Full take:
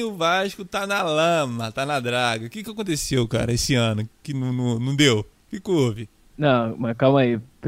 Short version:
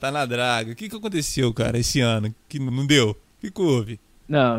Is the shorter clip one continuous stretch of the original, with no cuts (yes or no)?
no